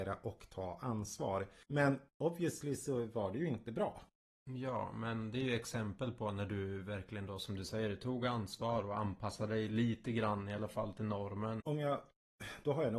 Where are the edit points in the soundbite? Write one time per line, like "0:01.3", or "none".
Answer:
0:04.4
0:11.6